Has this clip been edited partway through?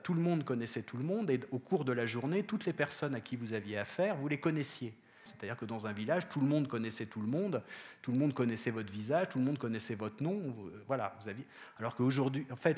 yes; 1 cut; at 5.3 s

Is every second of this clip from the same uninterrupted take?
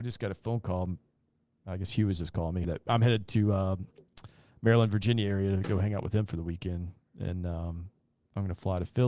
no; 1 cut; at 2.6 s

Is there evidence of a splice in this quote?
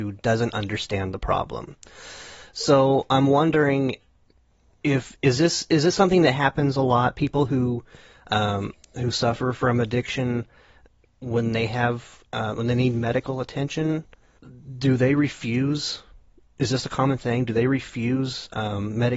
no; 0 cuts

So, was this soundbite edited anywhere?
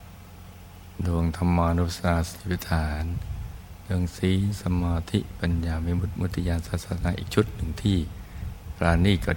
no; 0 cuts

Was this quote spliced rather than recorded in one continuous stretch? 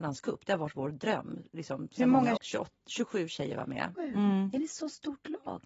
yes; 2 cuts; at 2.4 s, 3.9 s

